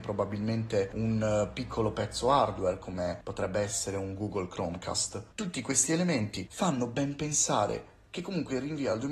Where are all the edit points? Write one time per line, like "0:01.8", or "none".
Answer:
none